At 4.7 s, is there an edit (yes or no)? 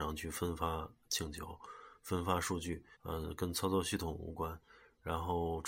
no